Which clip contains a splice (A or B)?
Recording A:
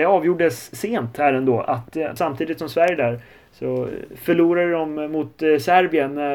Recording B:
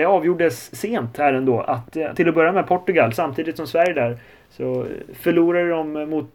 A